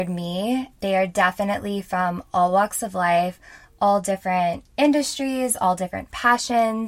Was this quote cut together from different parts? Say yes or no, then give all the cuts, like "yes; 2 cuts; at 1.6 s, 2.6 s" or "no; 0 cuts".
no; 0 cuts